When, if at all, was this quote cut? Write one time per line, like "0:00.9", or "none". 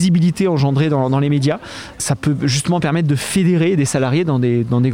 0:01.9